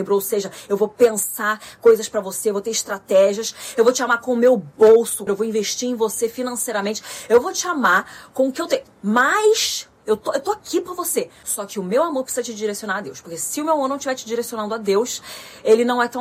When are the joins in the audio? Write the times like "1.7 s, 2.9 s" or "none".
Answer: 5.3 s